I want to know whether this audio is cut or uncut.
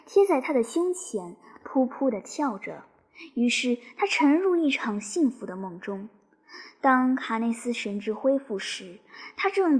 uncut